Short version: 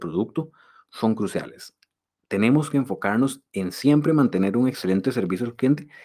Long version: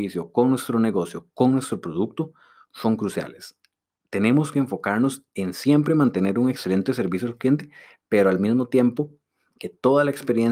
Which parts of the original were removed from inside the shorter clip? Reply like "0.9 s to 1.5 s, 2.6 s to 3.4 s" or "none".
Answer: none